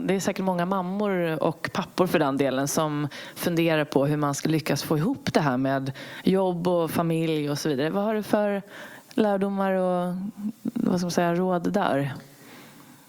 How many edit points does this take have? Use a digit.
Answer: 1